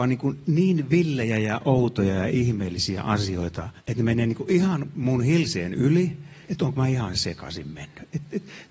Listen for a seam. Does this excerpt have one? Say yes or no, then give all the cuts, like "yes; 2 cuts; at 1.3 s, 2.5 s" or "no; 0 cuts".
yes; 2 cuts; at 3.8 s, 6.4 s